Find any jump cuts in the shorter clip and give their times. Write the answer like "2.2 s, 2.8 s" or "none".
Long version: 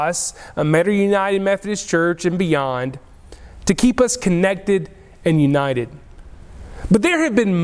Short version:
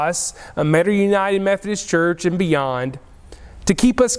none